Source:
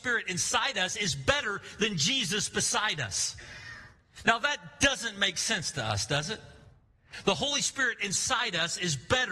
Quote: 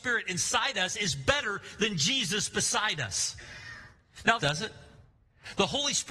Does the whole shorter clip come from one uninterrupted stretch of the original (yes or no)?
no